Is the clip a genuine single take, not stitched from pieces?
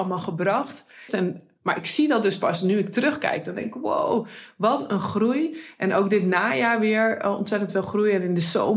no; 1 cut; at 1.1 s

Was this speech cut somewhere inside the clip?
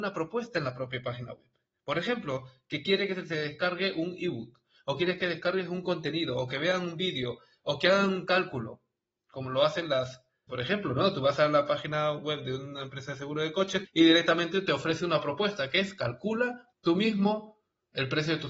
yes; 3 cuts; at 10.5 s, 13.8 s, 16.7 s

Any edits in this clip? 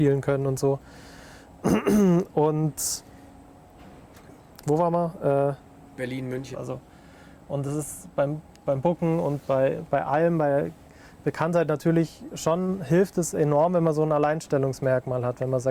yes; 1 cut; at 6.5 s

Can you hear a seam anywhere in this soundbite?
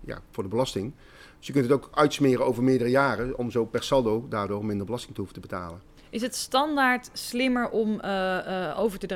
no; 0 cuts

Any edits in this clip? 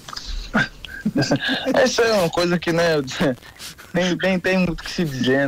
no; 0 cuts

